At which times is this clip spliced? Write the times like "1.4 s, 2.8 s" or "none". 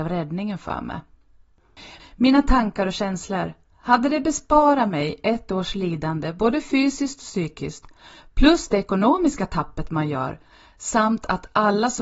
2.0 s